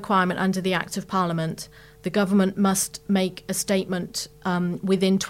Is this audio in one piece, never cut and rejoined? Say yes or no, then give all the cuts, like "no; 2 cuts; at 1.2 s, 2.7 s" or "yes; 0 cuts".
yes; 0 cuts